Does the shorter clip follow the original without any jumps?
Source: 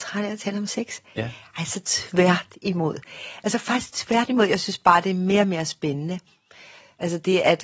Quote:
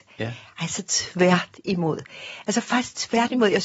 yes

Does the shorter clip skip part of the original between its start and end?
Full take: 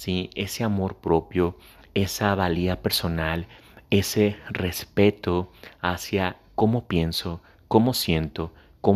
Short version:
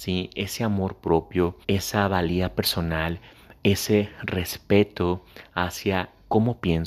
yes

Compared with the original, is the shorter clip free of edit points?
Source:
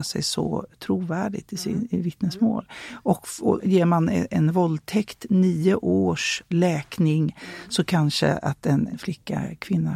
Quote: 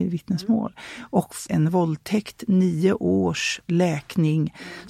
no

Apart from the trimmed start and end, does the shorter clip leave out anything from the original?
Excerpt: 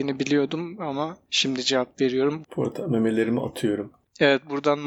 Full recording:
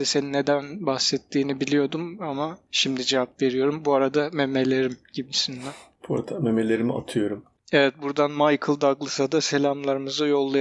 yes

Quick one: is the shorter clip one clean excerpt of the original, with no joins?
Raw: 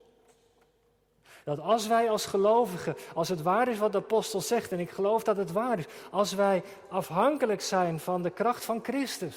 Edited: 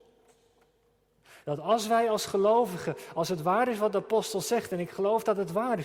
yes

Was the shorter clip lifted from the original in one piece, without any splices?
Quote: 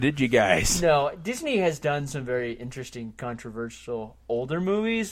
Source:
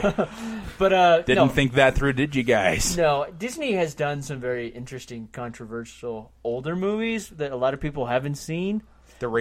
yes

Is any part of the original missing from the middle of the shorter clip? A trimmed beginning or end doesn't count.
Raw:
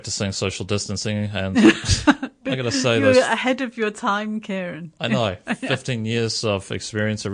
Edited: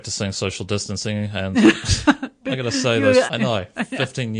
yes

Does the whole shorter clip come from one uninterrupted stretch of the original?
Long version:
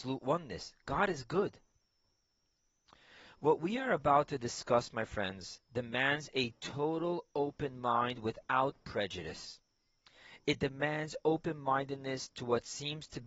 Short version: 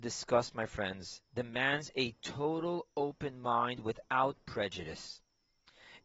yes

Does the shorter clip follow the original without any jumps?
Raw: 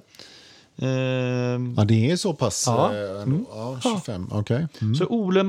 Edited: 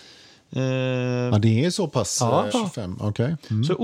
no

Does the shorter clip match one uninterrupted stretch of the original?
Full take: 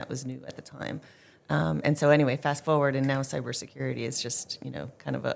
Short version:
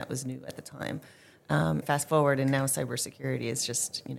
no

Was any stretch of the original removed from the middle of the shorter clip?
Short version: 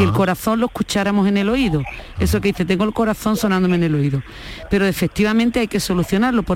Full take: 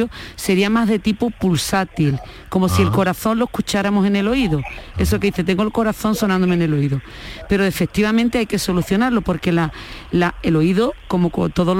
no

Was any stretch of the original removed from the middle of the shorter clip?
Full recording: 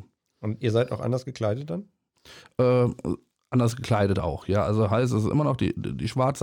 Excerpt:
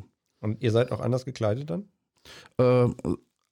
no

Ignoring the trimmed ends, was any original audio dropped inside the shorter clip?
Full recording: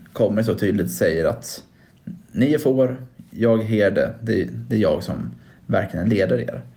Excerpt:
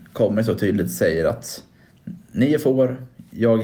no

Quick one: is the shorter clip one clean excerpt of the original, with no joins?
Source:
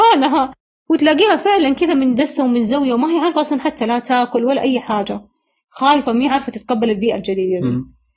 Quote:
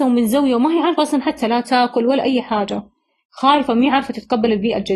yes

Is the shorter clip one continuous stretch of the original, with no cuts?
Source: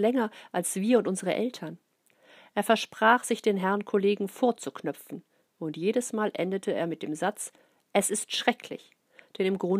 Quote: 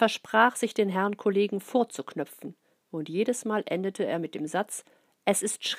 yes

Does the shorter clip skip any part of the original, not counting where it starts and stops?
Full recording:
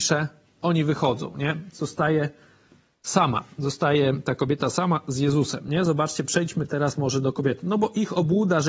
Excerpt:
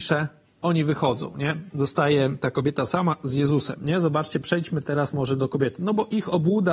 yes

